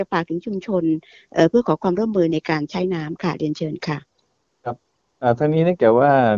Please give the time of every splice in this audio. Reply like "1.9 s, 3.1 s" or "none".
none